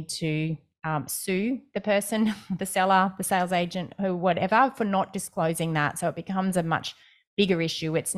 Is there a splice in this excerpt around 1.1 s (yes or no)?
no